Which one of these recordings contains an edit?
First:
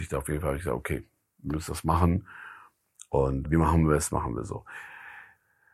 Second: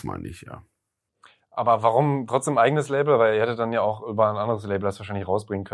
first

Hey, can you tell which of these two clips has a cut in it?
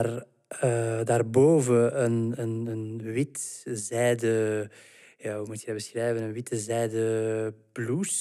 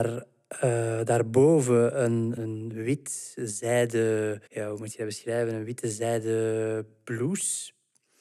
second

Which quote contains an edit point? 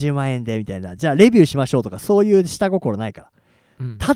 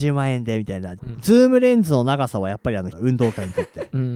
second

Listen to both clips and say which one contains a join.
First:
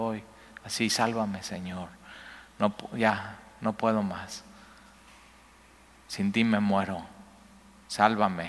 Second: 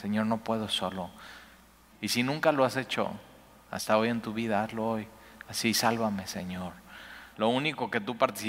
second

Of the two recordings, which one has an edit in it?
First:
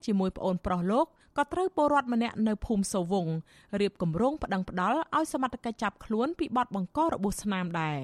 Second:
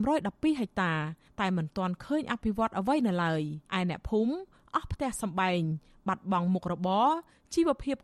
second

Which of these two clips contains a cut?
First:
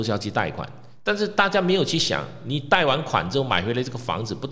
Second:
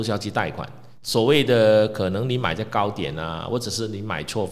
second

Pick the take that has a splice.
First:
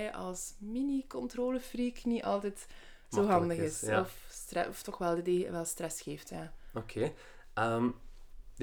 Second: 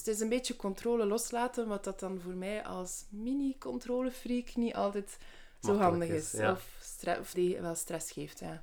second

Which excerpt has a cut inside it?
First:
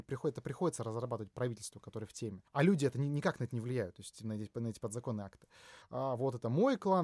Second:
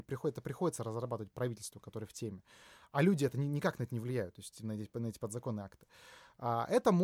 first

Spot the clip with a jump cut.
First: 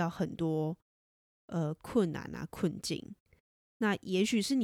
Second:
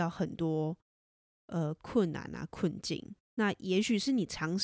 second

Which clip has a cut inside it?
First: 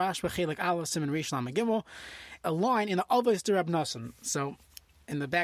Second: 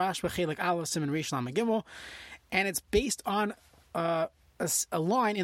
first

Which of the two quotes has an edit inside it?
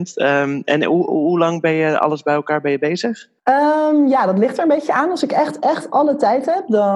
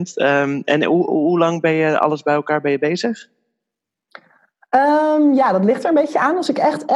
first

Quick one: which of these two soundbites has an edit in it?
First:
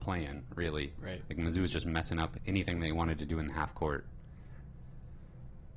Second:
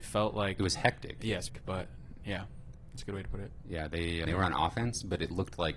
second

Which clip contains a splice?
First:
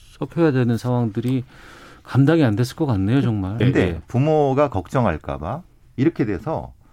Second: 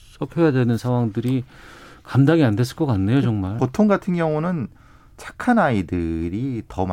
first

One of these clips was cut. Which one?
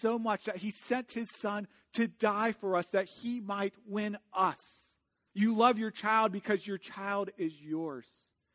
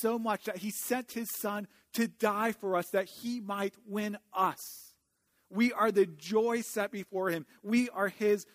first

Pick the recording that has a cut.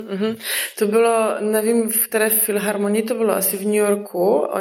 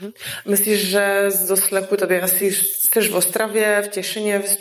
second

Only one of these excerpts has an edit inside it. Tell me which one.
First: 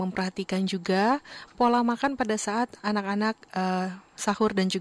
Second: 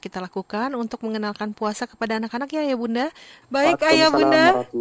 second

